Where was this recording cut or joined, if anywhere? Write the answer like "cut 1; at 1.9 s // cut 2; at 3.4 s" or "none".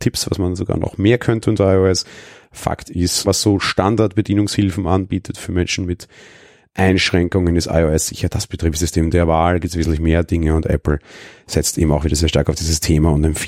cut 1; at 3.2 s